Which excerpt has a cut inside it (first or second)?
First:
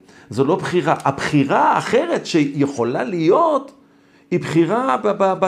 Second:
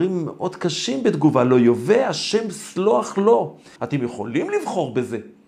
second